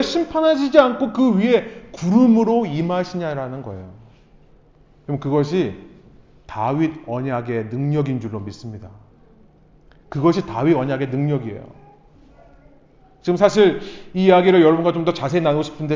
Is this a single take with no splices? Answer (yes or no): yes